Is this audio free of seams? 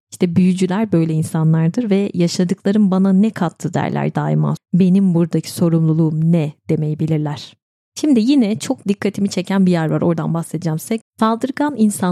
no; 2 cuts; at 4.6 s, 11.0 s

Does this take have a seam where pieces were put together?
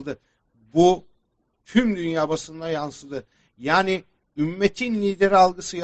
no; 0 cuts

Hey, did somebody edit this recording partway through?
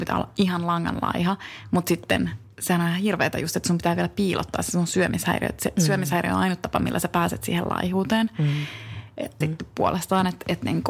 yes; 1 cut; at 9.4 s

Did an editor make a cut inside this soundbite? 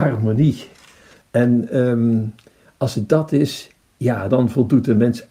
yes; 1 cut; at 4.3 s

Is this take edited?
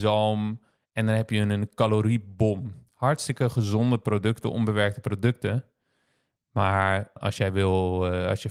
yes; 1 cut; at 7.2 s

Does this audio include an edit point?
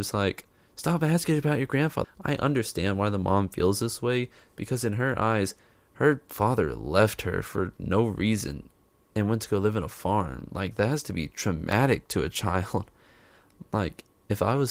yes; 1 cut; at 2.0 s

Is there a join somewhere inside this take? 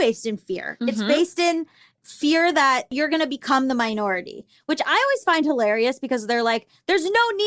no; 0 cuts

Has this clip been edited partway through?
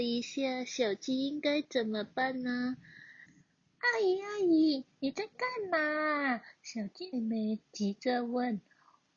yes; 2 cuts; at 3.3 s, 7.1 s

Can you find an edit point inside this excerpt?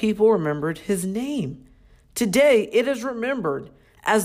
no; 0 cuts

